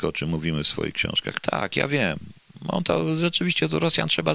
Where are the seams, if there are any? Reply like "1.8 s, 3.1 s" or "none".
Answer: 1.7 s